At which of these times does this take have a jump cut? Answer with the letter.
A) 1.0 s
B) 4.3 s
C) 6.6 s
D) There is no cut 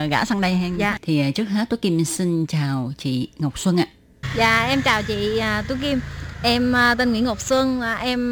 A